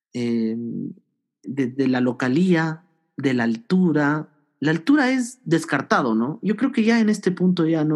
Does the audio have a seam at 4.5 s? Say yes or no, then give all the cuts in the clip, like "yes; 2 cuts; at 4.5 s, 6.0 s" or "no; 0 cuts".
no; 1 cut; at 1.4 s